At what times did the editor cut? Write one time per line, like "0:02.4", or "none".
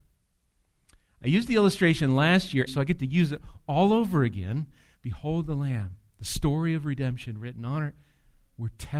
0:02.7
0:04.9